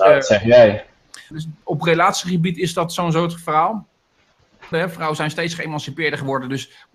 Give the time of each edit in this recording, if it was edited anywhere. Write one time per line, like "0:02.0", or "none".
0:01.3
0:04.7

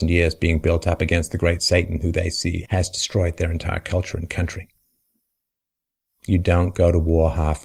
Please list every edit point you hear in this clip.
0:02.6

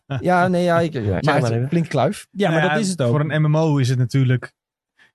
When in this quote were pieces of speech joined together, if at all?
0:01.2

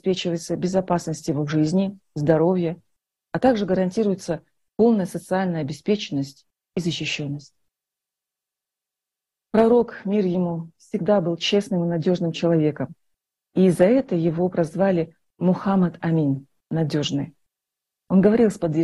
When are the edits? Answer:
none

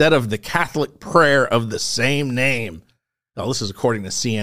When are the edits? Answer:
none

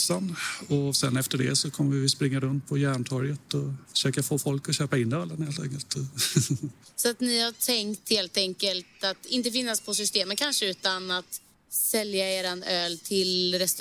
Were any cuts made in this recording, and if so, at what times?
0:03.8

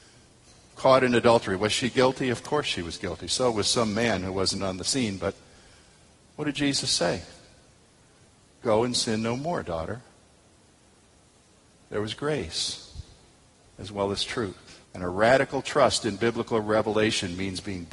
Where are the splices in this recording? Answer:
0:04.6
0:14.8

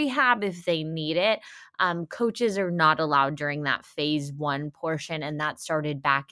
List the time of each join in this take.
none

